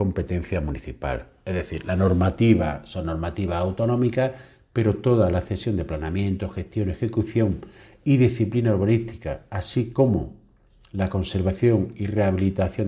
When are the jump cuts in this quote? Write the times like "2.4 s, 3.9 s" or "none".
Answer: none

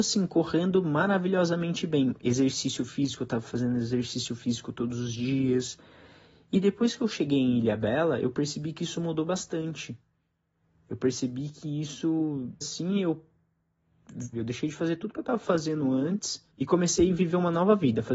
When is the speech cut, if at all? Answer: 12.6 s, 14.3 s, 16.5 s

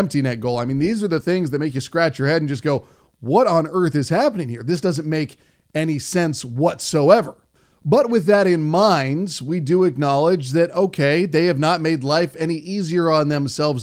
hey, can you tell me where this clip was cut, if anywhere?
none

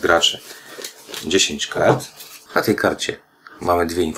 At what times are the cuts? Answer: 2.5 s

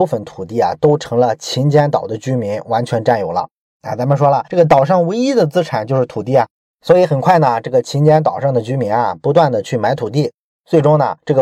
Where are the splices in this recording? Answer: 3.6 s

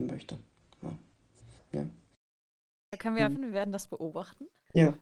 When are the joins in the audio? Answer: 1.6 s, 3.4 s

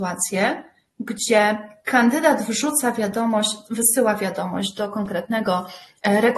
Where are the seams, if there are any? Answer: none

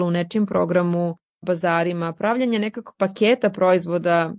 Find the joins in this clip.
1.4 s

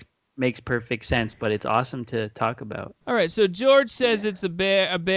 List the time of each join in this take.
3.0 s

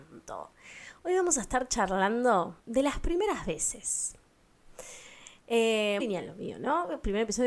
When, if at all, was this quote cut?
2.6 s, 6.0 s

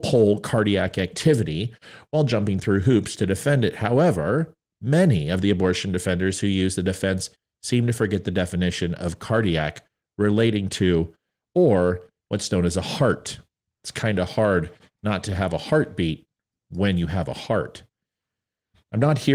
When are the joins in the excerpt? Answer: none

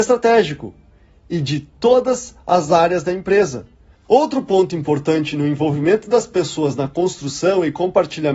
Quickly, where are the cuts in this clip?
4.0 s

